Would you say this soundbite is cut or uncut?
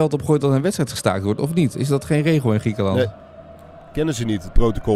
uncut